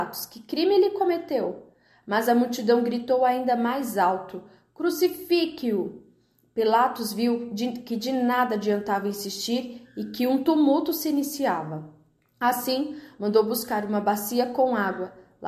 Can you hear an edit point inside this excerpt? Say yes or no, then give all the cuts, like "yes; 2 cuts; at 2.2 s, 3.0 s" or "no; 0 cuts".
no; 0 cuts